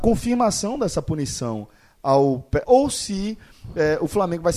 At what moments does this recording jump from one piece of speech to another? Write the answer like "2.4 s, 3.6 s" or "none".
2.6 s